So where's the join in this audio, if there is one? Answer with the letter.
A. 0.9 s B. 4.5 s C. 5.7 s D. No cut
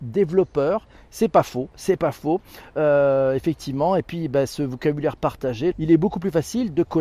C